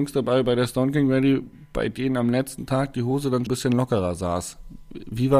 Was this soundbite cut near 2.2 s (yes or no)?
no